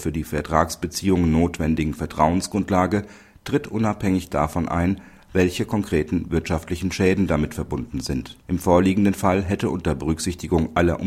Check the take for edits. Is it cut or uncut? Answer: cut